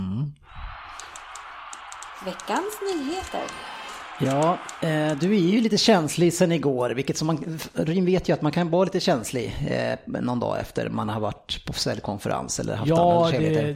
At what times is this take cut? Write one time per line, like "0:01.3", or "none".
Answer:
none